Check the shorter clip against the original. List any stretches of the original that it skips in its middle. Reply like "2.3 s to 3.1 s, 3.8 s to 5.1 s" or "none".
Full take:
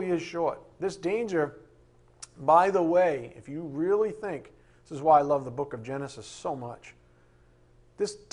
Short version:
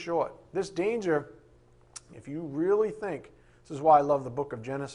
2.4 s to 3.3 s